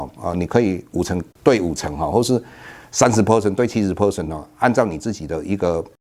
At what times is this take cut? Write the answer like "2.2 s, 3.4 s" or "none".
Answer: 1.3 s